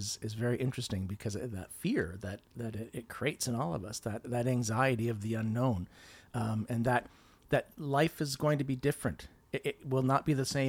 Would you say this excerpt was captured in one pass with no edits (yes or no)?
yes